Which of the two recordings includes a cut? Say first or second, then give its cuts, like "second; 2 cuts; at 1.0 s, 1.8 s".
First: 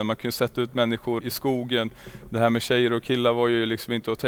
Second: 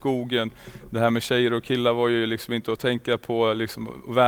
first; 1 cut; at 1.2 s